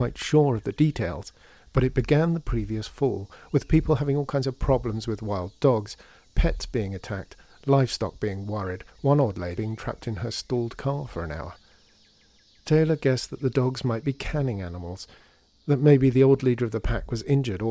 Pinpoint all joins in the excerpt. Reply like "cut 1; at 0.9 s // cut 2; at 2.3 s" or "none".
cut 1; at 9.6 s